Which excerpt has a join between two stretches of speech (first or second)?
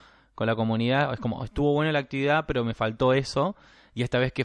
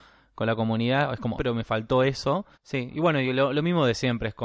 second